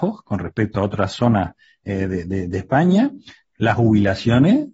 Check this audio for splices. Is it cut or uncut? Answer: uncut